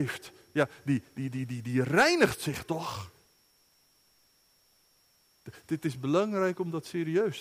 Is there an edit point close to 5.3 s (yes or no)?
no